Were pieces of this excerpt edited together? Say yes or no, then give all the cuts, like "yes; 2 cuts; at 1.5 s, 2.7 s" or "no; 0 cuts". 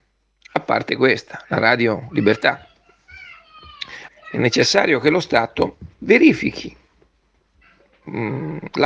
yes; 2 cuts; at 4.1 s, 6.0 s